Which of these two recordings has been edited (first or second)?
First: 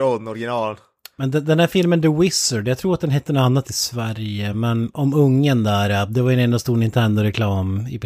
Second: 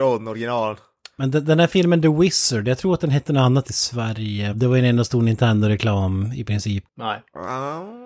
second